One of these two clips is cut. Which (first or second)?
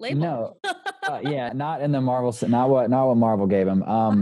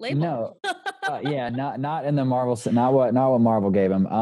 first